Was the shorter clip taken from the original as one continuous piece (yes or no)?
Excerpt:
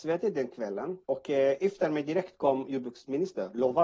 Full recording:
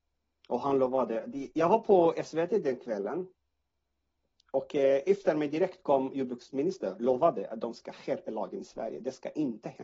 no